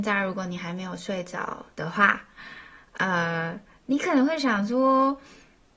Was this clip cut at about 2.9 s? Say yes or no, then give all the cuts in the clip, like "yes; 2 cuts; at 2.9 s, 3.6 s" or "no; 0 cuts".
no; 0 cuts